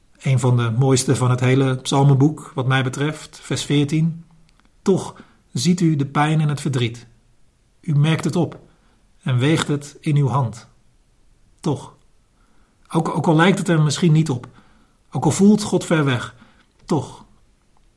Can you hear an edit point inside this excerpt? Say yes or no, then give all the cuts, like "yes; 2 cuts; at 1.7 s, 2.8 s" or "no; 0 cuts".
yes; 1 cut; at 16.8 s